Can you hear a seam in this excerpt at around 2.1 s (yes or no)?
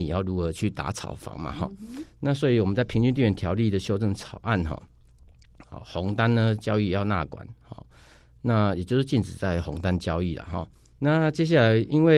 no